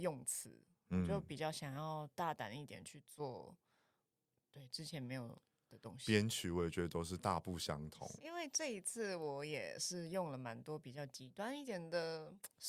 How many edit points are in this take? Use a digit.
1